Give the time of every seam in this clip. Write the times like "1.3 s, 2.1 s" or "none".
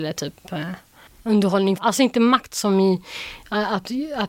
1.8 s